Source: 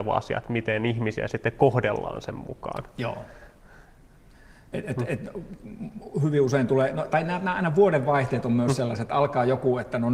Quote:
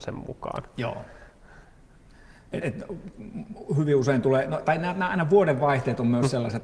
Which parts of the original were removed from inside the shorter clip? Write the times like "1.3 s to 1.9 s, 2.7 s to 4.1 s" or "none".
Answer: 4.8 s to 5.1 s